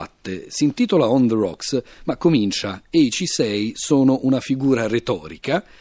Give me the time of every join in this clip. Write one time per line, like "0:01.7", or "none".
none

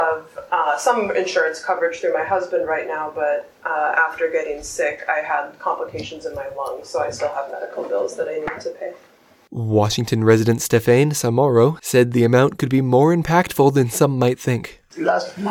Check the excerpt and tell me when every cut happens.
none

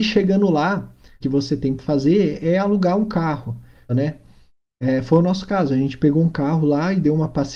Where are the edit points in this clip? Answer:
0:01.2
0:03.9

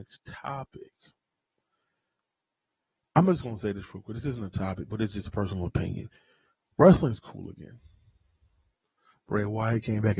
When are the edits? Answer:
none

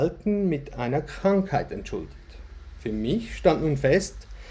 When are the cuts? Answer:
none

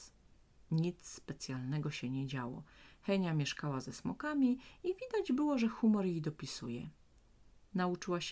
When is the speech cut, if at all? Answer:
none

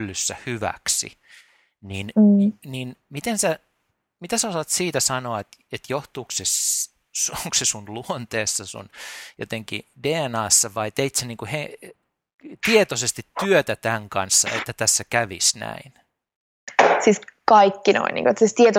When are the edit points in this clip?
none

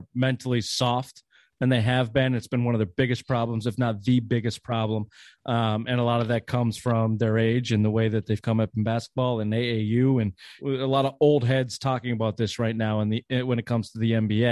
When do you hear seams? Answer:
0:10.6

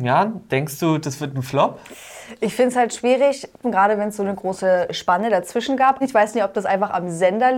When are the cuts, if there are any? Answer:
0:03.6
0:06.0

